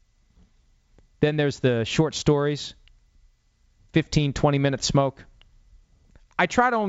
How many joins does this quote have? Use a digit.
1